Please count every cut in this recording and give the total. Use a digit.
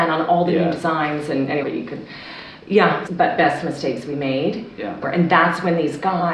3